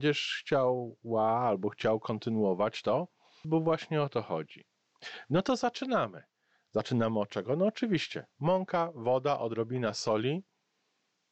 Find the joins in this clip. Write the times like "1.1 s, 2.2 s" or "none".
3.4 s